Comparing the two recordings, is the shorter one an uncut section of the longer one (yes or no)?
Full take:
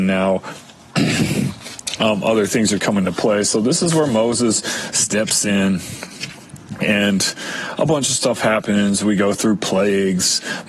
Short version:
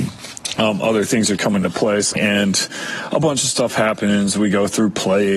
no